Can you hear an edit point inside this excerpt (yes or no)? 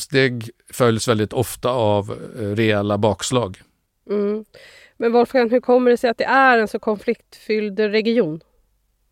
no